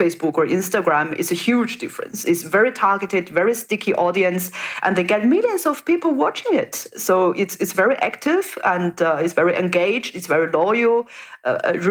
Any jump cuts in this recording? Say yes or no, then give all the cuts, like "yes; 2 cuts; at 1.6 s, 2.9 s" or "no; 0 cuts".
no; 0 cuts